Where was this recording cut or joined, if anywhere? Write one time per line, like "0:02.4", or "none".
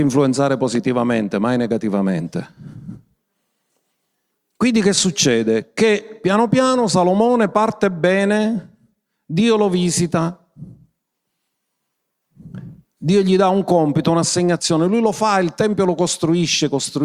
none

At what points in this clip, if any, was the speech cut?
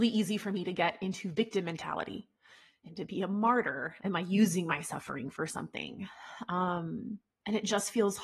0:04.0

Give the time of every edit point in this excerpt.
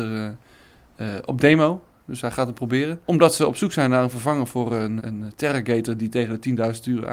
0:05.0

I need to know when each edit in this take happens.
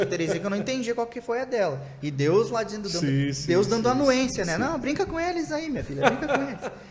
none

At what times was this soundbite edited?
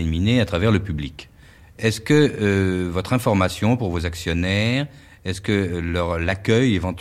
none

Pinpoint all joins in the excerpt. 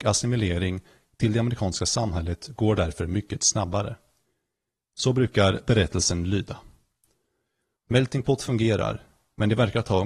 0:07.8

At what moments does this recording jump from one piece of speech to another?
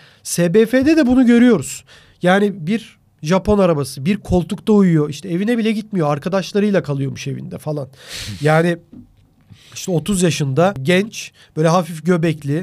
none

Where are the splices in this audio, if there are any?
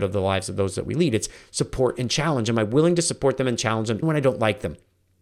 0:04.0

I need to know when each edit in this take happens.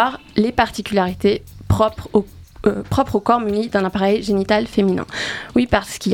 none

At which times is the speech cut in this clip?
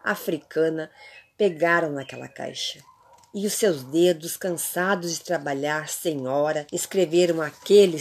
0:06.7

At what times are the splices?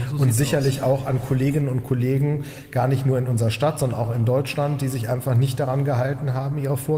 none

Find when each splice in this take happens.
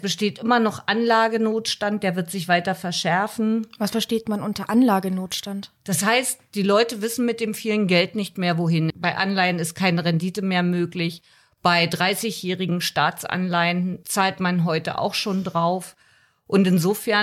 0:08.9

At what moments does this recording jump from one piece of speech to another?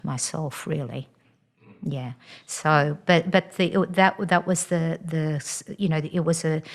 none

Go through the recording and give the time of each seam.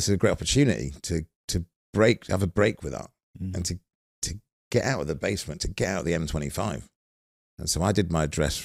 none

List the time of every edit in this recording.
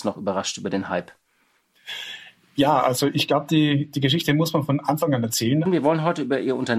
0:05.7

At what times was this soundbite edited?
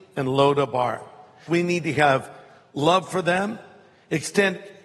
0:01.5

